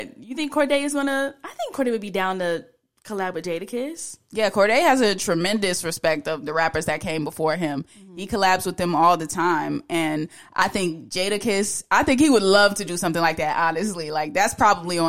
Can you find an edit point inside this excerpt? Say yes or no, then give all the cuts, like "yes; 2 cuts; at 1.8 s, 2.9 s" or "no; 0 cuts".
no; 0 cuts